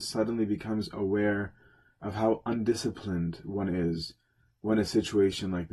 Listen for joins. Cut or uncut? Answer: uncut